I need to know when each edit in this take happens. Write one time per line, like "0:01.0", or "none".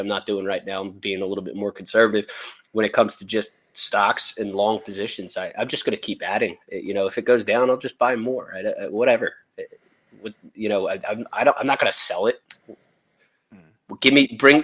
none